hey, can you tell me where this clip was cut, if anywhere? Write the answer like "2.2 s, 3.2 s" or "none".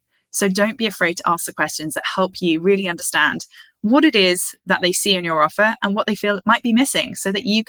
none